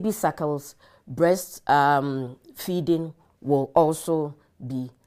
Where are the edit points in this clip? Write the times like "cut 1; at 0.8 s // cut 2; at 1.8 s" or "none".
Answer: none